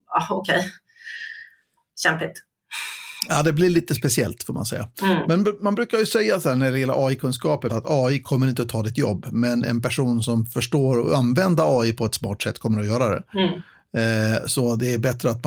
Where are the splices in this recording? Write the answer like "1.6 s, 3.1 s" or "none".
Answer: none

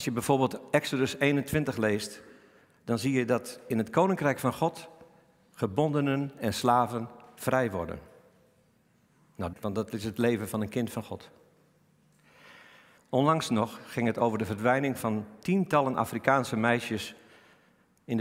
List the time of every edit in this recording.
9.5 s, 13.0 s

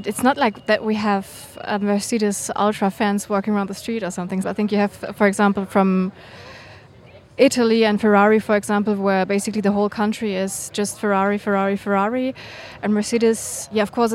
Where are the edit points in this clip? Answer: 4.4 s

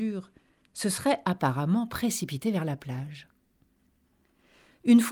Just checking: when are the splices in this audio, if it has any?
none

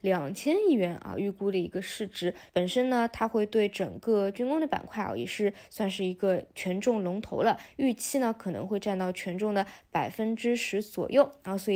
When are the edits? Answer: 2.5 s

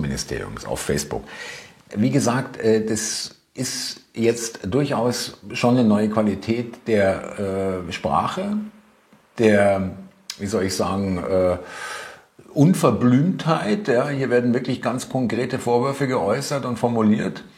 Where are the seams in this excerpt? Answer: 1.9 s

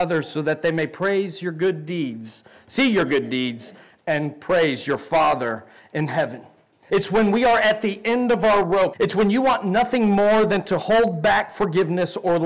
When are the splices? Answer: 6.9 s, 8.9 s

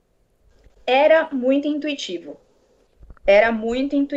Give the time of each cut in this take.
none

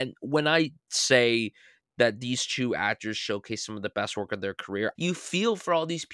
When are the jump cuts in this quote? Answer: 4.9 s

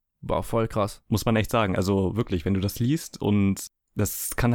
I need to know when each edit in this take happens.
none

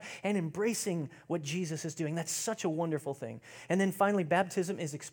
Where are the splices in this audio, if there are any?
none

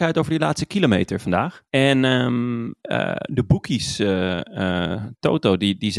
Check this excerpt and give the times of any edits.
1.7 s

